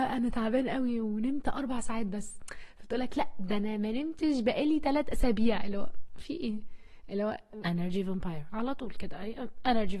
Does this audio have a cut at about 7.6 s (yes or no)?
yes